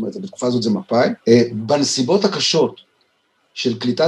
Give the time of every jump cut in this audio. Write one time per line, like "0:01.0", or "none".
0:01.2